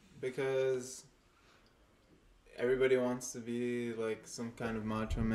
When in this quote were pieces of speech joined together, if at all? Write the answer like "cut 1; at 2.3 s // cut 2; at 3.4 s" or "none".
none